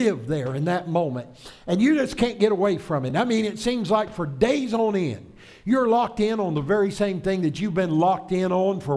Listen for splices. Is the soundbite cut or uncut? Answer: uncut